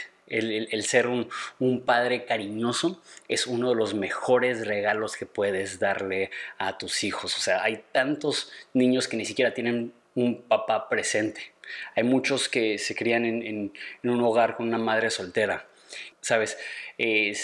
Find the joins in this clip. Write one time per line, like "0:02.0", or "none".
0:16.1